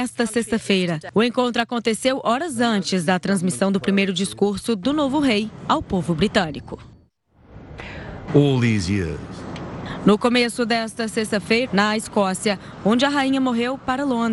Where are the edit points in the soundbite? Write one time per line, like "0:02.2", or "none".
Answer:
0:08.3
0:11.7